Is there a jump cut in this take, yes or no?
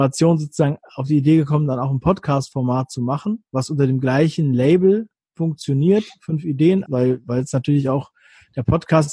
yes